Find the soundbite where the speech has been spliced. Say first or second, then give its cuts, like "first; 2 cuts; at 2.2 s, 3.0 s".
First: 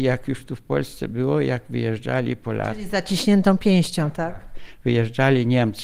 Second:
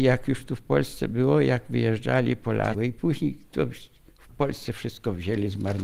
second; 1 cut; at 2.7 s